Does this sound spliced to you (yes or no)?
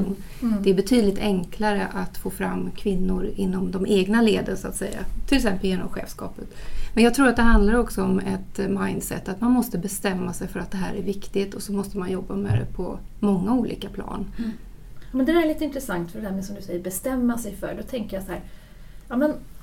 no